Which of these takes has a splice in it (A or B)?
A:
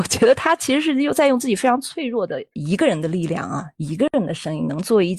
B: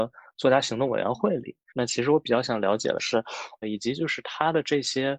B